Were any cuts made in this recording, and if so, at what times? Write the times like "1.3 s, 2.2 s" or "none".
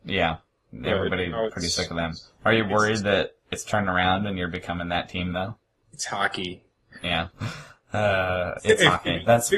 7.3 s, 8.6 s